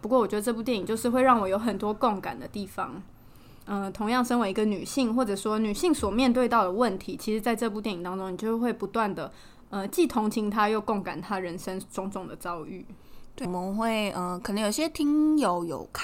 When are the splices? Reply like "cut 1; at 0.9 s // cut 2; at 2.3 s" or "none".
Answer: cut 1; at 13.5 s